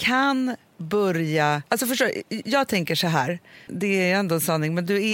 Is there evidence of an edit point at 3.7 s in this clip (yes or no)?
yes